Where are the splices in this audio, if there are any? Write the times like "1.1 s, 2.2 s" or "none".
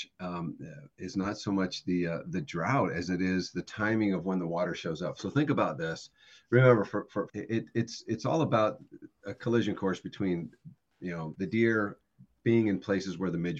7.3 s, 11.3 s